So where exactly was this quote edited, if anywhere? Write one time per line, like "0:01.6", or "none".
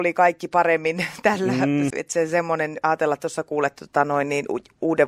0:01.9